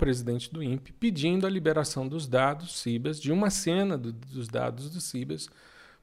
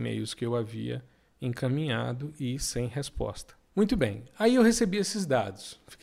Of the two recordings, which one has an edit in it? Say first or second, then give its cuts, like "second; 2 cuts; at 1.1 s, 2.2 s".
second; 1 cut; at 3.7 s